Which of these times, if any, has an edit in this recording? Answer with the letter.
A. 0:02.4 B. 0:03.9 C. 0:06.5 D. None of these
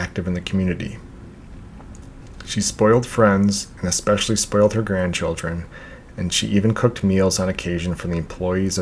D